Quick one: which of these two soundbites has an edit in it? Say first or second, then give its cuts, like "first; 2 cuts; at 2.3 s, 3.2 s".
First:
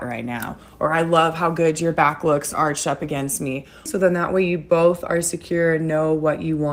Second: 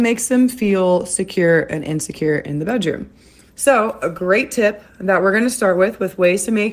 first; 1 cut; at 3.9 s